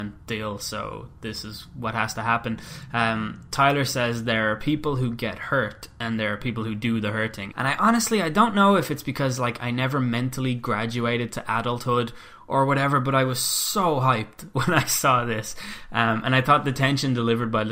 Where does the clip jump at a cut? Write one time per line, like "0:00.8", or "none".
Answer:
0:07.5